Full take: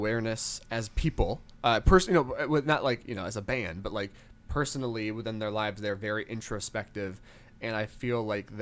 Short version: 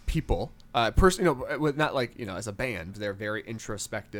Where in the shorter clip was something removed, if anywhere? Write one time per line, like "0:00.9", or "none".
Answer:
0:02.9

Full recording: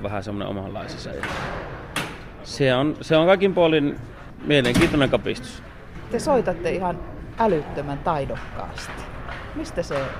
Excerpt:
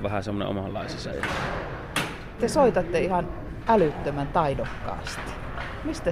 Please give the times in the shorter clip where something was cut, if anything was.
0:02.4

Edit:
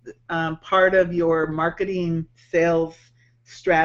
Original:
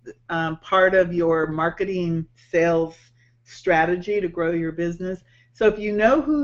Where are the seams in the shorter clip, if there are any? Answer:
none

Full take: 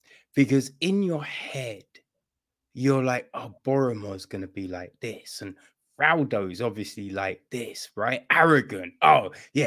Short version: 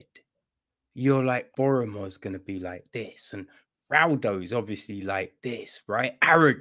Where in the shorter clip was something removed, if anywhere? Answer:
0:01.5

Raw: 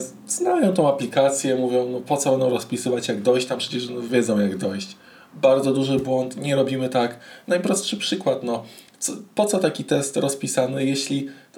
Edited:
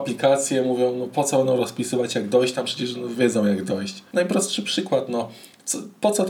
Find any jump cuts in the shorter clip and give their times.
0:04.1

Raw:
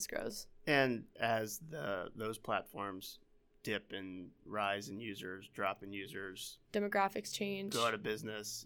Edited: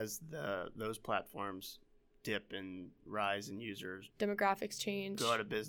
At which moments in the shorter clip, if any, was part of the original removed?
0:04.1

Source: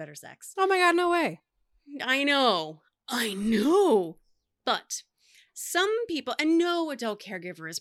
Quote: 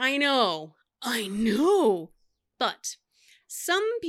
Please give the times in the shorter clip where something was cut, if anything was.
none

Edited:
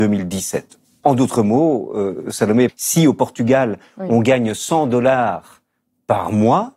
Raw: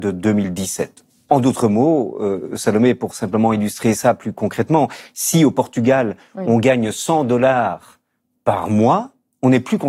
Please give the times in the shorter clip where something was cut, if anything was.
0:02.7

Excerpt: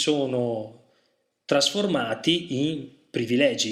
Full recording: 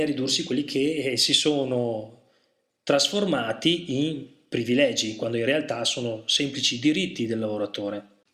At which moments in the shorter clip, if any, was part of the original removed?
none

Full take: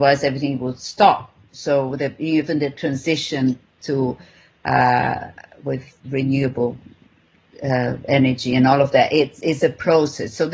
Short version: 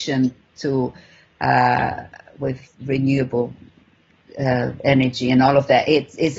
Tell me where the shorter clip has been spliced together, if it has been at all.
none

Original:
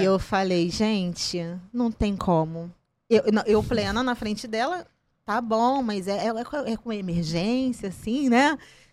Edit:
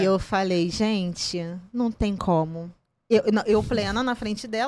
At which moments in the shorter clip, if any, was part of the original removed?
none

